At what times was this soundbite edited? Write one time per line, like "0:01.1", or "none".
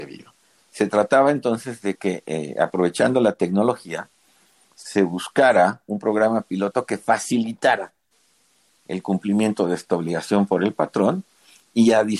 none